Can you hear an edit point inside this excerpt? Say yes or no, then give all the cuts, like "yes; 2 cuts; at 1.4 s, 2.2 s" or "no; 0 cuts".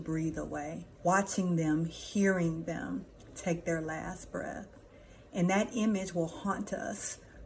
yes; 1 cut; at 1.0 s